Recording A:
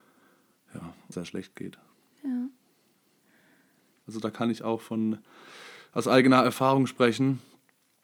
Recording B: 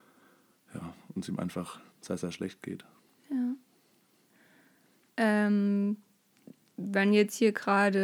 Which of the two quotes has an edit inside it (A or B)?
A